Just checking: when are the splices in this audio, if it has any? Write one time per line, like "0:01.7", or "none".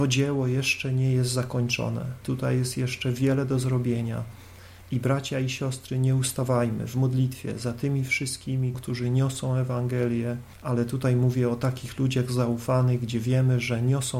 0:02.2
0:08.7
0:10.6

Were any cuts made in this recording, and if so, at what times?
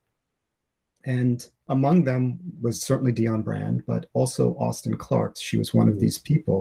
0:05.4

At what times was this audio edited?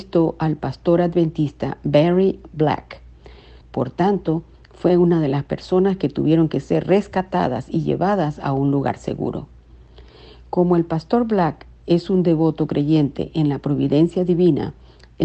0:03.6

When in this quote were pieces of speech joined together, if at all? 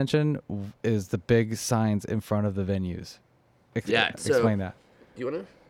0:04.1

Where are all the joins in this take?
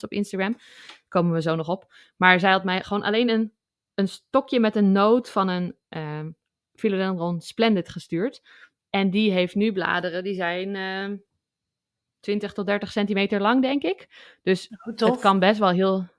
none

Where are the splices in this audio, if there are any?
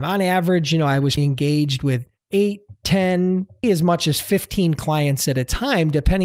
0:01.2
0:03.6

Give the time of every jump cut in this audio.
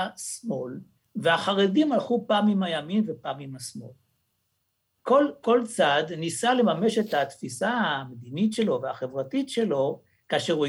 0:05.0

